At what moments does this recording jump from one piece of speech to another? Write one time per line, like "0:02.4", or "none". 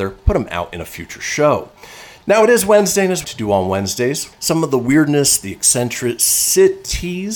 0:03.2
0:04.3